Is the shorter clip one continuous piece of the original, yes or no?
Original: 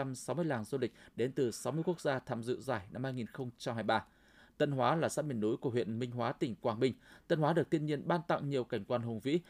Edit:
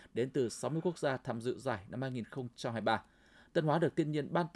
no